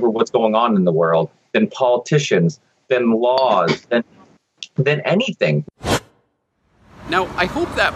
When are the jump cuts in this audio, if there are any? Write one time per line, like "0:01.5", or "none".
0:05.7